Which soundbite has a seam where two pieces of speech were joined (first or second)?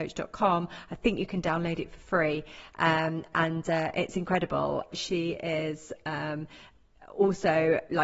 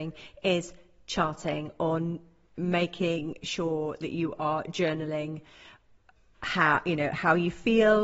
first